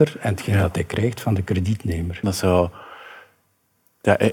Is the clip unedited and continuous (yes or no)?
no